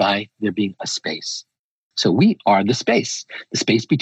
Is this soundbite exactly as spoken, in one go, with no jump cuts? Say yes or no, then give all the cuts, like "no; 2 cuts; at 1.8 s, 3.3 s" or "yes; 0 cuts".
no; 1 cut; at 1.9 s